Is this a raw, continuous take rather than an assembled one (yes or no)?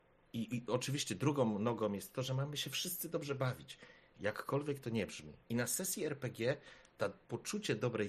no